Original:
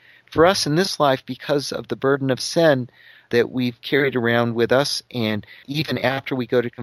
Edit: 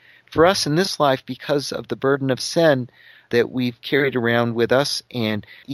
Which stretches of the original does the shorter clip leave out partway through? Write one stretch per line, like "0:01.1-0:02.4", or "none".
none